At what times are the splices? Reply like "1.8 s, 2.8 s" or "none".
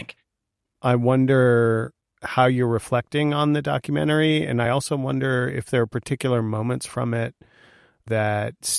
none